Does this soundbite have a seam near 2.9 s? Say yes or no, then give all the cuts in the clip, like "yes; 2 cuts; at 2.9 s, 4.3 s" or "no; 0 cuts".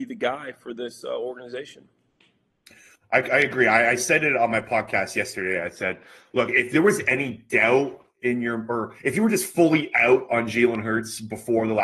no; 0 cuts